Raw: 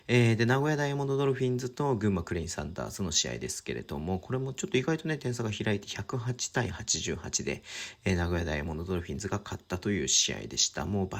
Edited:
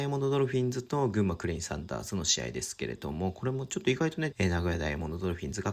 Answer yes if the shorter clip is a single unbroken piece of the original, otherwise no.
no